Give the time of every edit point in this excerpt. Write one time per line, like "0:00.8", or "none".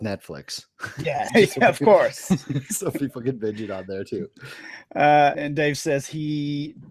0:01.3
0:05.3

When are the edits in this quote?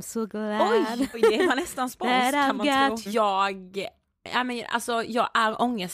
0:01.1
0:03.1

